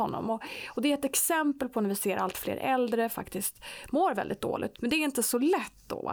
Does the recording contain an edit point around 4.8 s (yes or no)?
yes